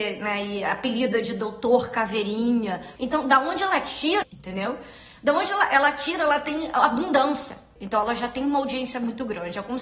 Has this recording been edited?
yes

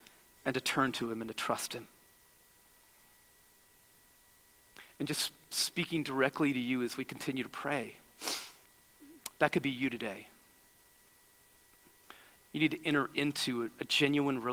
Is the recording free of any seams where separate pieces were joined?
no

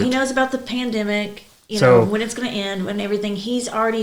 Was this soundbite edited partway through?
no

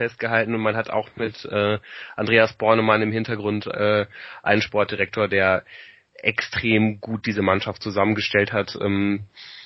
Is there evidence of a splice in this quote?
no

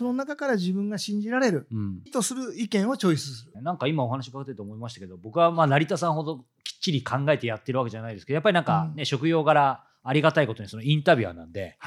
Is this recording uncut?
no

